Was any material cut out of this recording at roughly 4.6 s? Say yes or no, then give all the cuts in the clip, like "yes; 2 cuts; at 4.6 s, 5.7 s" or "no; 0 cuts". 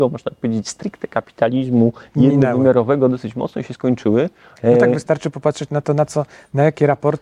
yes; 1 cut; at 4.6 s